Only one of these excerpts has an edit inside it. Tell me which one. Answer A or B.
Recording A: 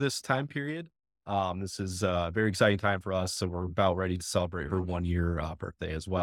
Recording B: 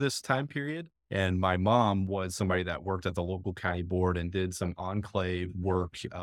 B